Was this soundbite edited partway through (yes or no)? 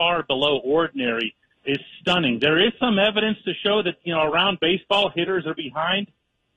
yes